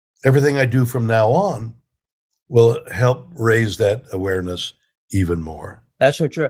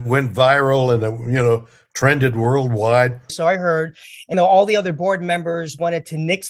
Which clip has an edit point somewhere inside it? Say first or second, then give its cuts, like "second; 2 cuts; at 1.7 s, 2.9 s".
second; 2 cuts; at 3.3 s, 4.3 s